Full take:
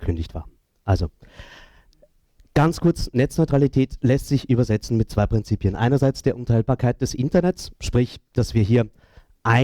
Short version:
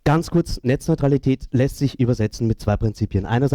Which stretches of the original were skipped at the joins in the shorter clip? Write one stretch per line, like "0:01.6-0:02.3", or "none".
none